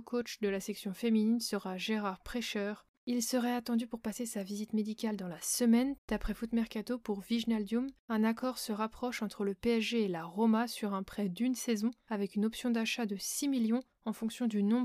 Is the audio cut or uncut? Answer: cut